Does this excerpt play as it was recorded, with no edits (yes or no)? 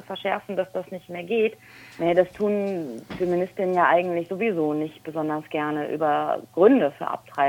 no